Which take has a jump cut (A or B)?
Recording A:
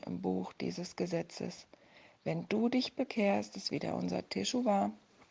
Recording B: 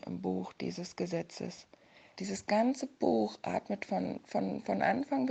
B